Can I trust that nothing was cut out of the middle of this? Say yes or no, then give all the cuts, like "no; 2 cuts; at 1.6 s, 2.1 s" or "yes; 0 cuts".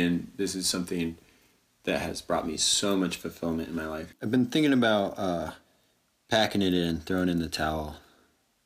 no; 1 cut; at 4.1 s